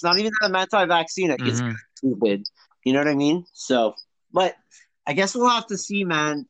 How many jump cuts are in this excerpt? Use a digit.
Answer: 1